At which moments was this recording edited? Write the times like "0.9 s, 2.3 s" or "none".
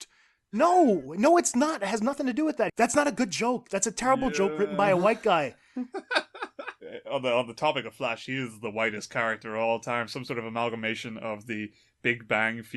2.7 s

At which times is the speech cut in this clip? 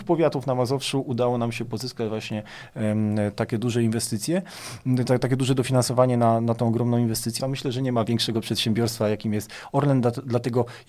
7.4 s

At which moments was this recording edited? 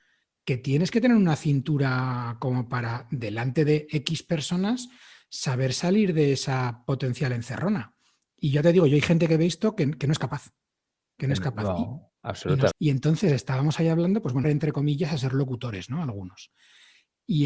12.7 s, 14.4 s

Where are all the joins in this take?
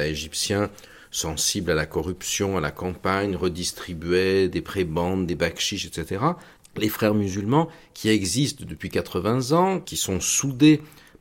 6.6 s

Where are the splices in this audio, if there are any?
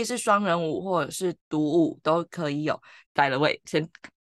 3.0 s

